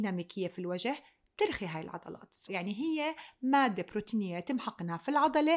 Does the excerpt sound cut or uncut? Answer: cut